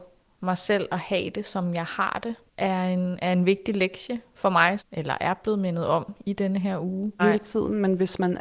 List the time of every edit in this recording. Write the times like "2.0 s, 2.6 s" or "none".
4.8 s, 7.2 s